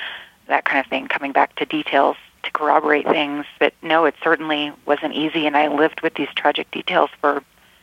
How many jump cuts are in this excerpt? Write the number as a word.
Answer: one